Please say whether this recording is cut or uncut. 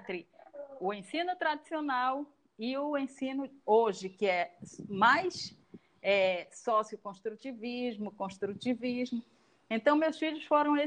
uncut